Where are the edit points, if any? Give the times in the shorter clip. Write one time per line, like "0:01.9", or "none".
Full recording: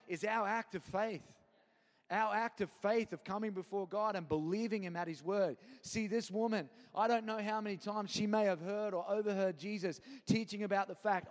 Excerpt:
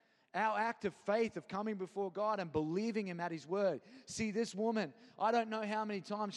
none